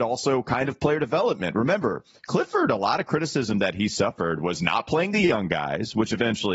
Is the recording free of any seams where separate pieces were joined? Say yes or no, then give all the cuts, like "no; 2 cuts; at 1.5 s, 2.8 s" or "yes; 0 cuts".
yes; 0 cuts